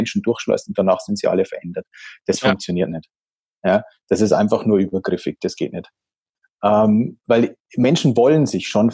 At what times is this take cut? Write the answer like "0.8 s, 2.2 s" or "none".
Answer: none